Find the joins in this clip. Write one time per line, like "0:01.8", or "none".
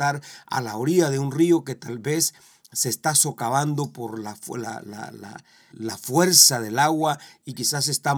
0:05.7